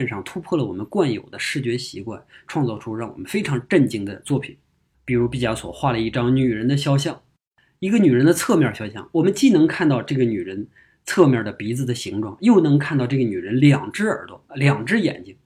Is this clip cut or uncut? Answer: uncut